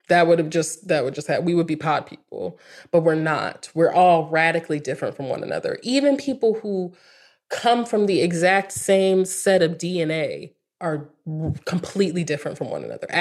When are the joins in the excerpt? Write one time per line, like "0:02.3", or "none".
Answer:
none